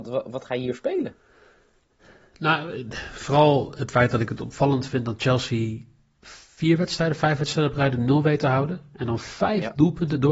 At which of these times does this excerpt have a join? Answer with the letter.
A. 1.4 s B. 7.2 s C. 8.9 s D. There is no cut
D